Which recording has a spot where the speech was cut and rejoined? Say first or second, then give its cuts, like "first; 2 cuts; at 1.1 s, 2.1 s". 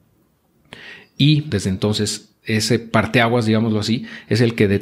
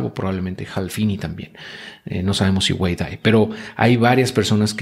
first; 1 cut; at 1.5 s